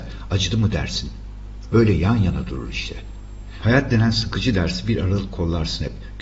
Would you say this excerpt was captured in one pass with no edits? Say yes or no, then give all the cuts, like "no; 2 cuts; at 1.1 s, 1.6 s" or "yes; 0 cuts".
no; 2 cuts; at 1.7 s, 3.6 s